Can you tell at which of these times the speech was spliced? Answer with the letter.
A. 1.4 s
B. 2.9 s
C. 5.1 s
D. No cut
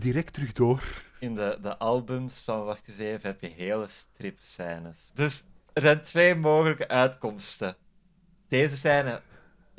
C